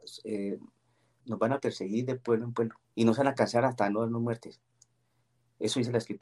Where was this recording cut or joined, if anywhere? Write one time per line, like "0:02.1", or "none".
0:01.2
0:02.8

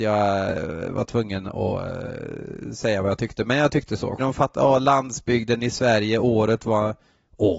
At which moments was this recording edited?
0:04.2

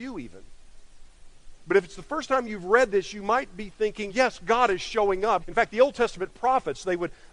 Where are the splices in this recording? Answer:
0:04.1
0:05.4

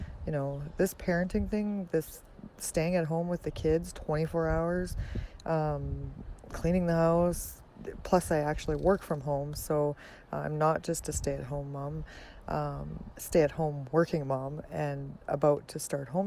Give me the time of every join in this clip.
0:13.1

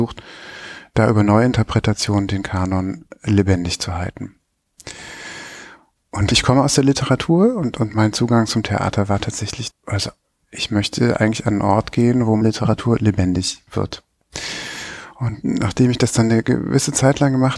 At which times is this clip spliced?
0:09.7
0:13.7

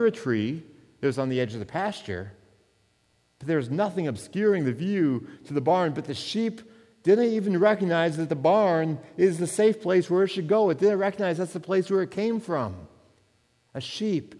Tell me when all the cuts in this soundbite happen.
none

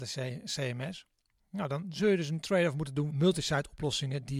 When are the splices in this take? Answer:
0:03.1

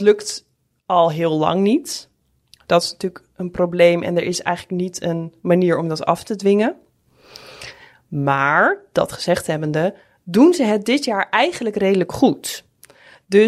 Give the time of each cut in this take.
none

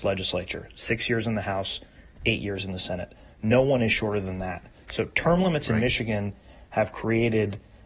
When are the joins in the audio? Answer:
none

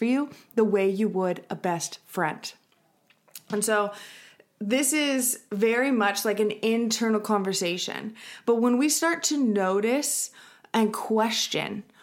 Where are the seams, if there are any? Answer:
none

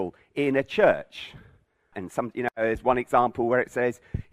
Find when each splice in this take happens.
0:01.9

